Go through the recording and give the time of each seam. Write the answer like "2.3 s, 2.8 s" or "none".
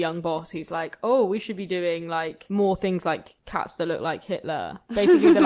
none